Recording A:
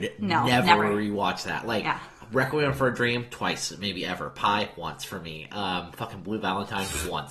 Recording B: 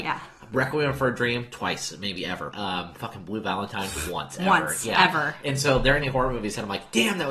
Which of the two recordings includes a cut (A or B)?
B